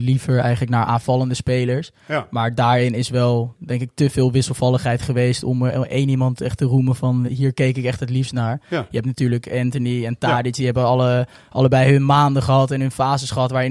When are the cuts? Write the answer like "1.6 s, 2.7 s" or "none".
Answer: 7.3 s